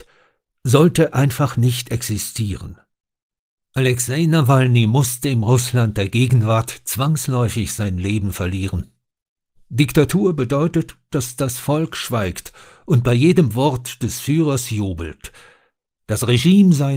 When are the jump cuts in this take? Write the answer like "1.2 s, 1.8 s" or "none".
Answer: none